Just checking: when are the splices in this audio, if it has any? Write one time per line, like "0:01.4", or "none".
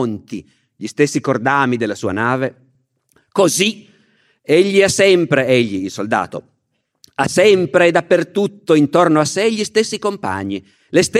none

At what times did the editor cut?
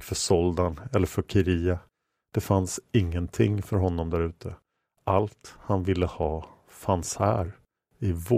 none

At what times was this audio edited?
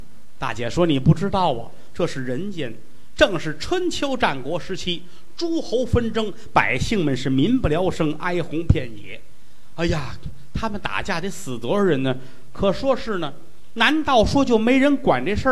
none

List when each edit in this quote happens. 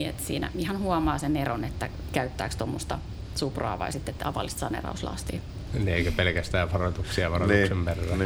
0:05.7

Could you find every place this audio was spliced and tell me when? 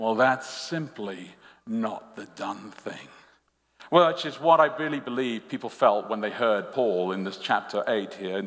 none

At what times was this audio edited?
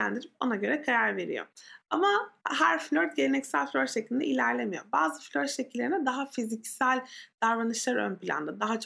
none

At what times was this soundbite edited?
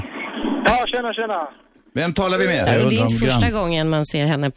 0:02.7

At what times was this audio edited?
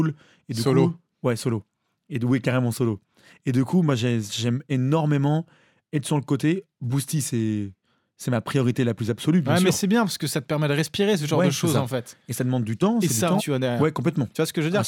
0:13.4

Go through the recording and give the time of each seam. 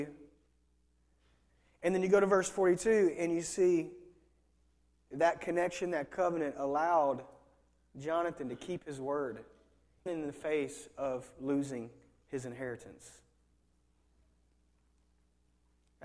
0:10.1

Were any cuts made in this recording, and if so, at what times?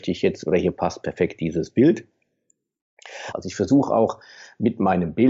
0:03.3

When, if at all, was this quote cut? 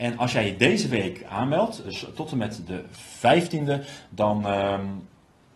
0:01.8

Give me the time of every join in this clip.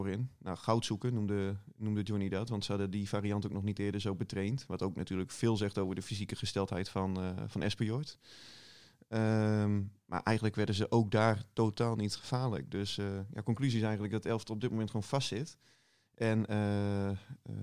none

